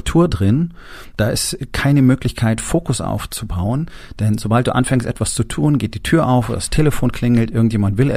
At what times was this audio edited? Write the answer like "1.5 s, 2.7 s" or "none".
none